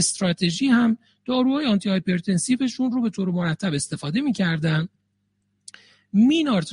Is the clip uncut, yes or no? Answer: yes